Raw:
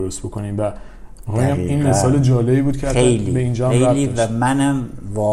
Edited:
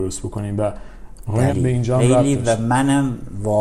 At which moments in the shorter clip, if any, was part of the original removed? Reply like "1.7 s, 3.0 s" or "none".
1.5 s